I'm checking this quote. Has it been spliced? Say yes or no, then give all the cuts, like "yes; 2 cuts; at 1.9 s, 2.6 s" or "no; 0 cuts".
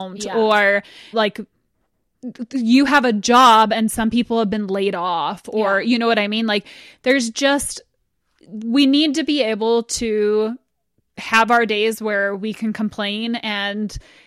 yes; 1 cut; at 1.1 s